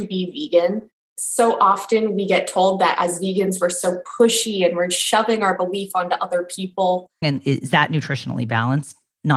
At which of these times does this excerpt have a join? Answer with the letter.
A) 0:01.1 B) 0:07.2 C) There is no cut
B